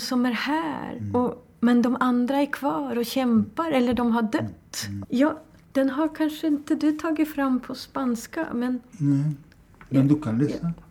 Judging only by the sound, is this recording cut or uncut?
cut